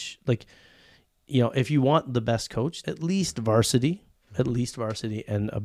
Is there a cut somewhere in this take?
yes; 1 cut; at 2.8 s

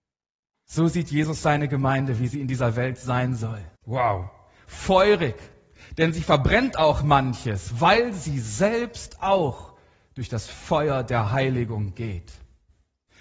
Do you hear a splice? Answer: yes; 1 cut; at 3.8 s

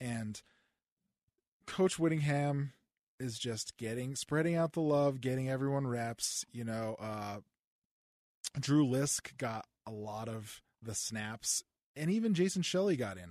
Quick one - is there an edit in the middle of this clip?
no; 0 cuts

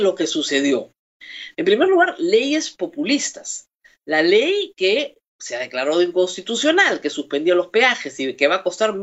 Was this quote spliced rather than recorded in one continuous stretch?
yes; 1 cut; at 1.5 s

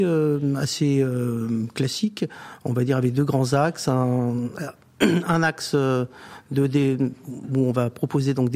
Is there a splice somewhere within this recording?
no; 0 cuts

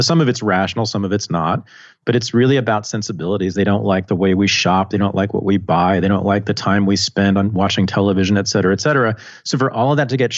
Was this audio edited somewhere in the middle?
no; 0 cuts

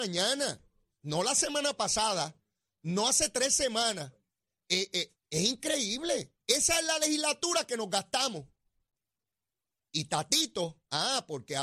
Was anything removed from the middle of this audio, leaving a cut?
yes; 2 cuts; at 5.1 s, 6.4 s

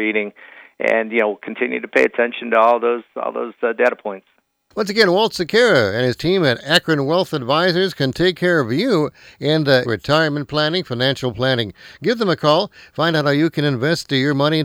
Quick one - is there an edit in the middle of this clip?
yes; 1 cut; at 9.8 s

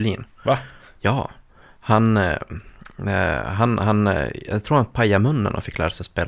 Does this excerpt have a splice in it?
no; 0 cuts

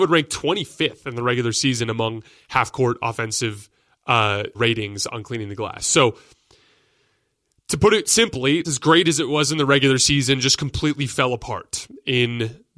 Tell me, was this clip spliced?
yes; 2 cuts; at 4.5 s, 8.6 s

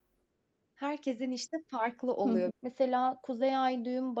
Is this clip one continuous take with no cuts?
no; 1 cut; at 2.5 s

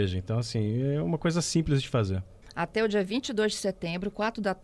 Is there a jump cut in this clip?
yes; 1 cut; at 2.4 s

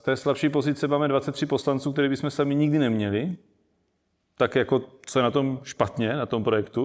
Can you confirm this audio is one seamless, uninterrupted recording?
yes; 0 cuts

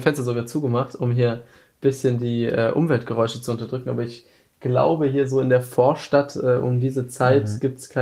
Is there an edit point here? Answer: no; 0 cuts

